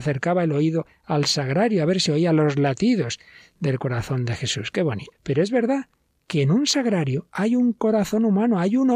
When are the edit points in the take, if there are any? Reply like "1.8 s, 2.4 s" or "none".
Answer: 5.1 s, 7.3 s